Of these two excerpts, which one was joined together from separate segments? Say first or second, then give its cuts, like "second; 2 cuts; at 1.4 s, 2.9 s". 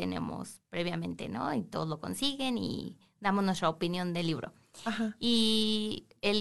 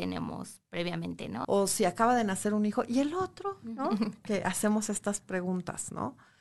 second; 1 cut; at 1.4 s